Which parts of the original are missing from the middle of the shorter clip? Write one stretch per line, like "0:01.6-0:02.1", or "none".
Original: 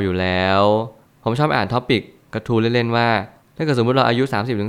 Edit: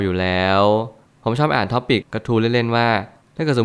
0:02.0-0:02.2